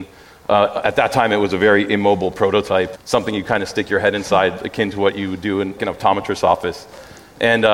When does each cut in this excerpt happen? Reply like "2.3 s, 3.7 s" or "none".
3.0 s, 5.8 s